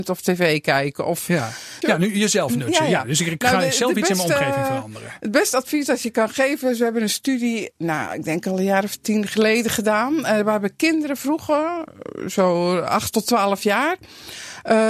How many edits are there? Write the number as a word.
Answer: one